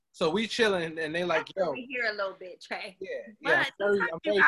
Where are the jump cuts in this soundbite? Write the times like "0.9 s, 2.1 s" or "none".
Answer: none

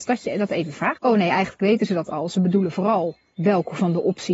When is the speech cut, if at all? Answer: 1.0 s

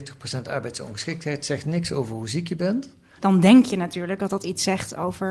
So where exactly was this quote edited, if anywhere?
3.2 s

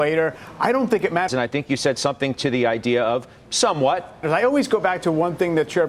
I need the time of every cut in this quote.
1.3 s, 4.2 s

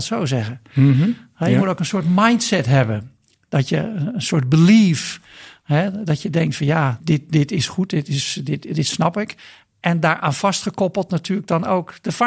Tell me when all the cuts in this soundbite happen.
7.0 s

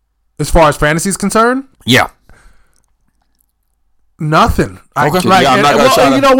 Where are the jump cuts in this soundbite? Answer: 1.8 s, 5.2 s

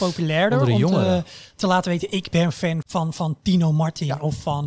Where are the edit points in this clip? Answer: 2.8 s

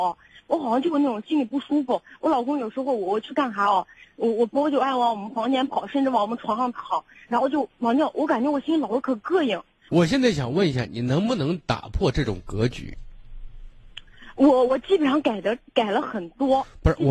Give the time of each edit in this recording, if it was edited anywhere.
9.9 s

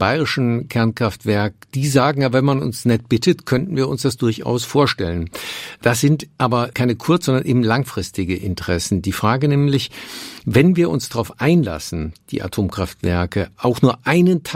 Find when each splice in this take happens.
none

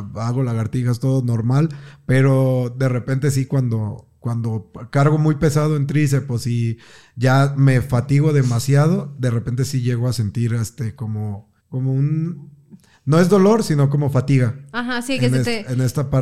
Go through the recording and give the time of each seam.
11.6 s

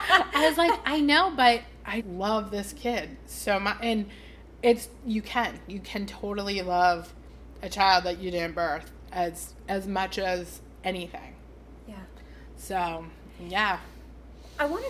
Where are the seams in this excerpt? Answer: 2.0 s

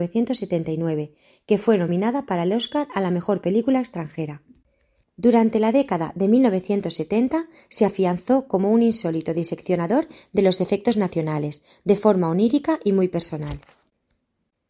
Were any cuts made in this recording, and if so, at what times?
5.0 s

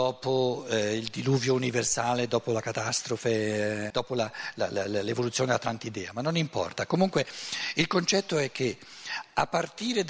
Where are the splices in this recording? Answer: 3.9 s

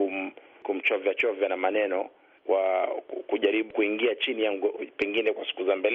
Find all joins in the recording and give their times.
4.7 s

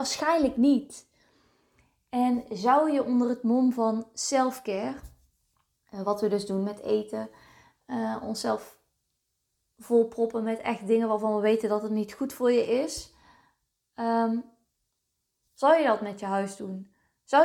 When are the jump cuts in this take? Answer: none

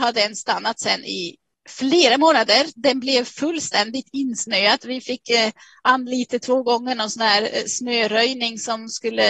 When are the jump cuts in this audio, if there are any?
none

